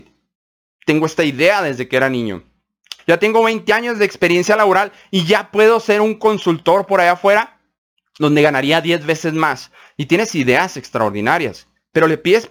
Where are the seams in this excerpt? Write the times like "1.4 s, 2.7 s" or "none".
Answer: 3.0 s